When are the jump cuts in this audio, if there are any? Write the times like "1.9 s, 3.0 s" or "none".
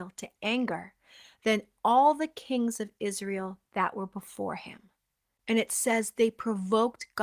5.2 s